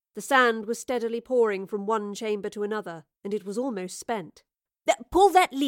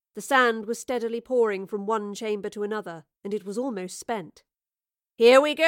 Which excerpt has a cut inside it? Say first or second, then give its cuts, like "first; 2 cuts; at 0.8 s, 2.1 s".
first; 1 cut; at 4.7 s